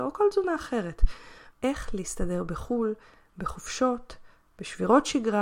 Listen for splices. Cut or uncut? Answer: cut